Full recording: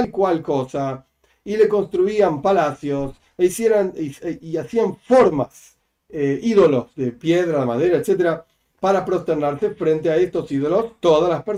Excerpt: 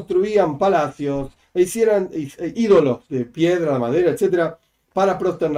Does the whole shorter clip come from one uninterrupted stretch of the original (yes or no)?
no